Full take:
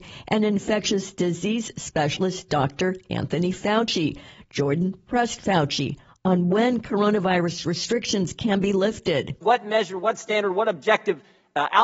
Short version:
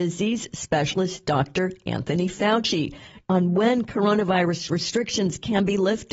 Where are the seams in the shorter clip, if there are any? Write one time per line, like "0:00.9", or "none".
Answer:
0:03.2